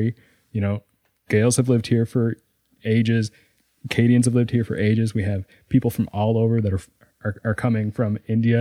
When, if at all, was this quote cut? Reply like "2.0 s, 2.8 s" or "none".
none